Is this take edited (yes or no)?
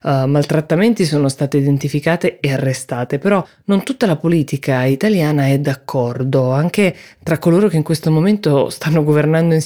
no